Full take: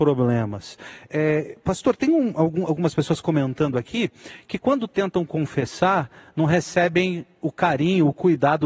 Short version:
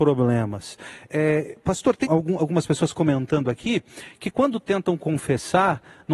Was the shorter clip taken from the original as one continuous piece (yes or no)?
no